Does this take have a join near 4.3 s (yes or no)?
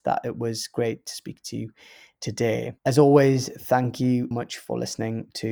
yes